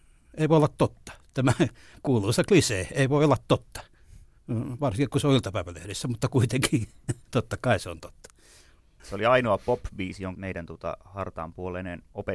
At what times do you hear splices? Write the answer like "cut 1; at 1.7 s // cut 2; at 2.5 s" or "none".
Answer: cut 1; at 9.0 s // cut 2; at 10.3 s